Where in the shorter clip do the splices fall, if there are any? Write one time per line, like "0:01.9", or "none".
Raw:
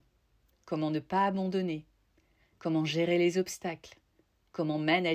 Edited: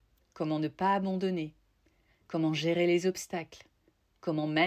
none